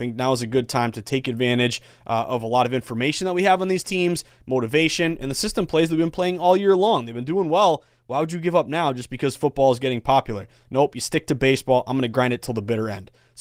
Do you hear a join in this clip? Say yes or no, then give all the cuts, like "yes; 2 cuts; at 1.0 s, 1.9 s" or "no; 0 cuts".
no; 0 cuts